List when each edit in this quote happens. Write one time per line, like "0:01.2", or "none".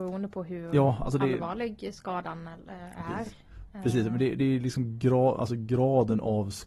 none

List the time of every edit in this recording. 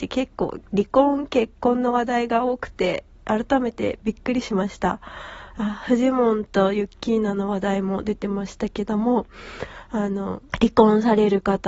0:10.5

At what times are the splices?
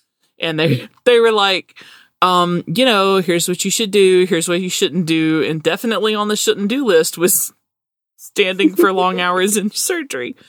none

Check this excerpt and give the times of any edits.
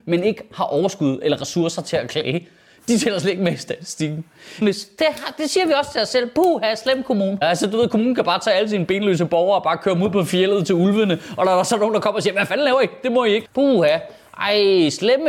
0:04.6
0:07.4
0:13.5

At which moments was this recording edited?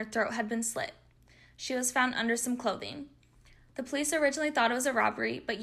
none

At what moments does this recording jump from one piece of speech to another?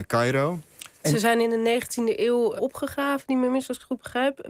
0:01.0
0:02.6

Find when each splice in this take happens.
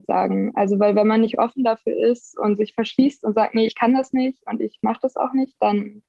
none

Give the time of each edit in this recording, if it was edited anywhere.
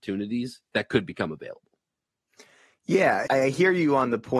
0:03.3

